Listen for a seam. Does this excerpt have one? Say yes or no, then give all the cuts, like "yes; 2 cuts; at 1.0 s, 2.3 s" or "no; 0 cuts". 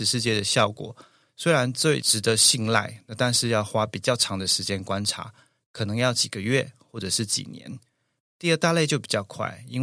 no; 0 cuts